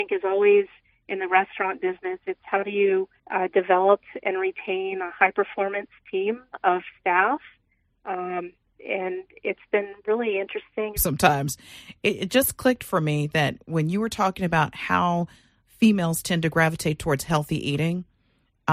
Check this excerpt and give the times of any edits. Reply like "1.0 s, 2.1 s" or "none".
3.2 s, 11.0 s